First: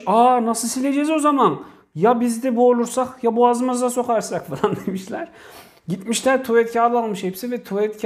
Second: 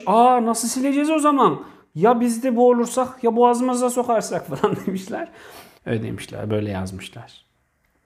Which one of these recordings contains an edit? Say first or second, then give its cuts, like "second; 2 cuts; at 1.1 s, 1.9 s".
second; 1 cut; at 5.8 s